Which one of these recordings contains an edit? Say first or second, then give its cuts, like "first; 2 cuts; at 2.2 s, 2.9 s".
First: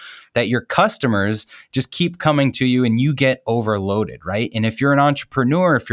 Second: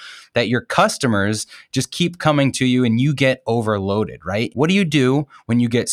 second; 1 cut; at 4.5 s